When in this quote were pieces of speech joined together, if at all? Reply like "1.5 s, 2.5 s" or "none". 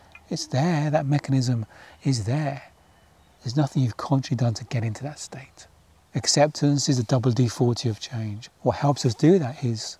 3.4 s, 6.0 s, 8.5 s